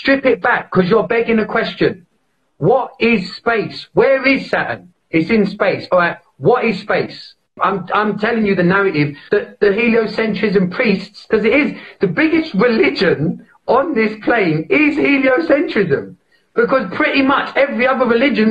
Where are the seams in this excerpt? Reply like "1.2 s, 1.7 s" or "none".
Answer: 7.6 s, 9.3 s